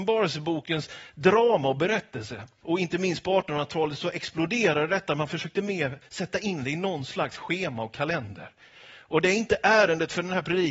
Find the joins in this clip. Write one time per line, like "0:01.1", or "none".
0:02.6